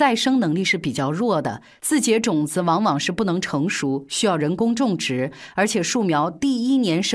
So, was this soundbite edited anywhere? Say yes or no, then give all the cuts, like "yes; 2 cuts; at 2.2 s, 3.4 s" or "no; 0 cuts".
no; 0 cuts